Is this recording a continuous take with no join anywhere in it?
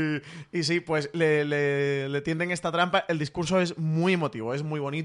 yes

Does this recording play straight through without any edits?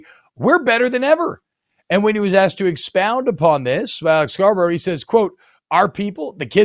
yes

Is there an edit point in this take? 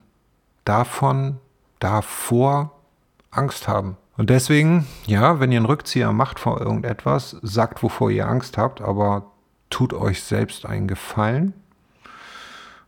yes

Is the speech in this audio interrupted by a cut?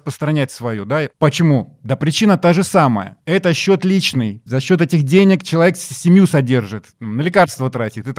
no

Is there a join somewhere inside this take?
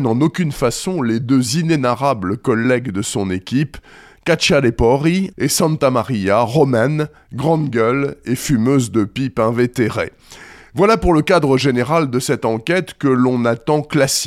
yes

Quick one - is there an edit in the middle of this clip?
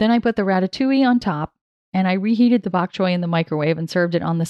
no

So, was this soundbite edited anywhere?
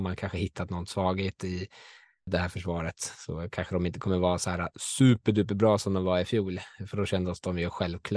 yes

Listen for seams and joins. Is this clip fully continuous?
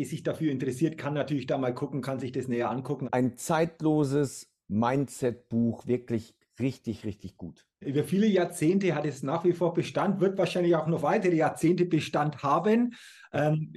no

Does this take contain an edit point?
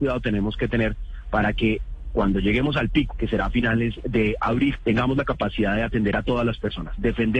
yes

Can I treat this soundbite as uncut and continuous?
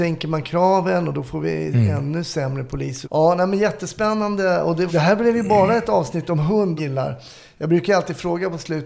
no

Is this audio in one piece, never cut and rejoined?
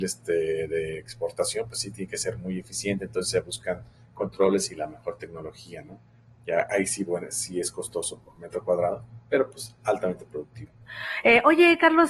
yes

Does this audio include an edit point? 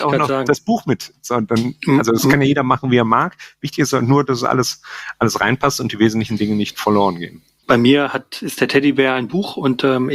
no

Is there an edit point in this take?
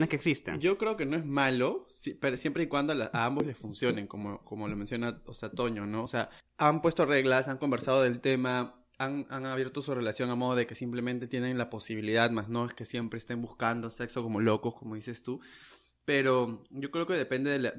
no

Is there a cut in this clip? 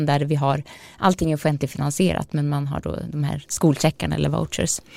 no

